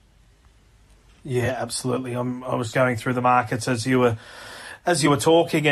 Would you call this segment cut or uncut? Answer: cut